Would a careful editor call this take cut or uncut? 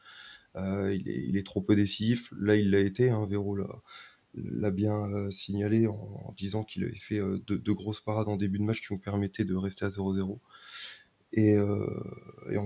uncut